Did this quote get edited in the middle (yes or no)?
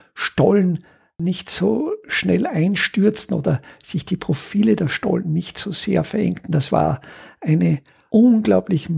no